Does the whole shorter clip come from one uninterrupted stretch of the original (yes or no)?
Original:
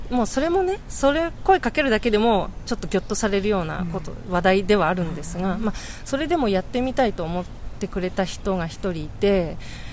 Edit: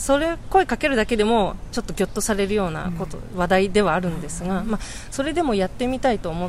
yes